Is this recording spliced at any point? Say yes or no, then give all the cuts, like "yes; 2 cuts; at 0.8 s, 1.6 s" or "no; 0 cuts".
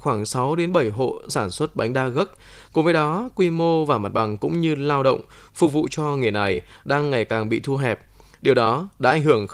no; 0 cuts